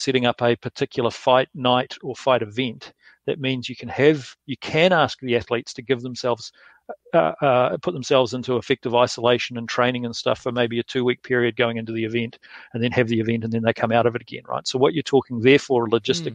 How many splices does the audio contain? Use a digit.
0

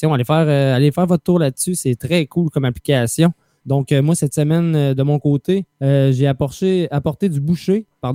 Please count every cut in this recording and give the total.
2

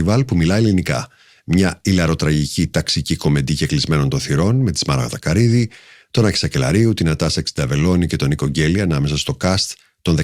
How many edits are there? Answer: 0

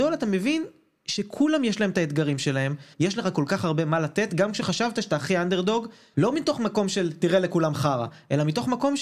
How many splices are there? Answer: 2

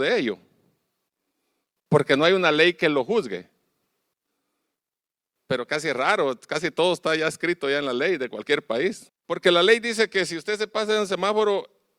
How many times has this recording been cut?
1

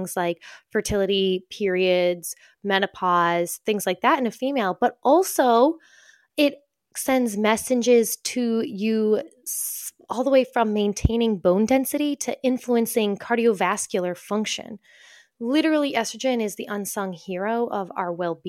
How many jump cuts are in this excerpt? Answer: 0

